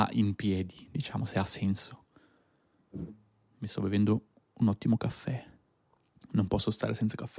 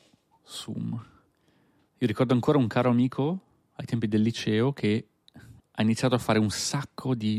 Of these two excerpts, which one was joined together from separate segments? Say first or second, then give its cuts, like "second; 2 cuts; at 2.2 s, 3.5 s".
second; 2 cuts; at 1.9 s, 5.6 s